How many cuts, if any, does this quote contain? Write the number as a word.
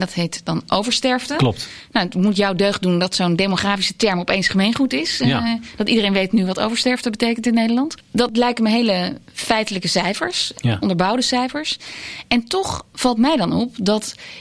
zero